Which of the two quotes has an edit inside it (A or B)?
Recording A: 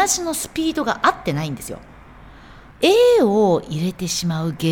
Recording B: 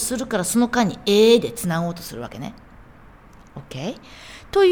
A